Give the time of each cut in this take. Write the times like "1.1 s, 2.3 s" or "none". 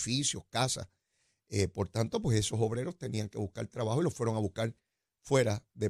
none